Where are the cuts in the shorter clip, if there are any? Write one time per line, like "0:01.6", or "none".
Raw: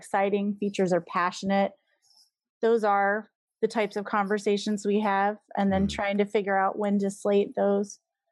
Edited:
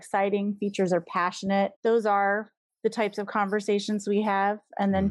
0:01.7